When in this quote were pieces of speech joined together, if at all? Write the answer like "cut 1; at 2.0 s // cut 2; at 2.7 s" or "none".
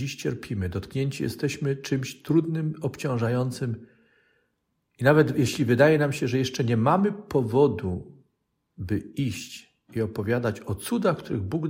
none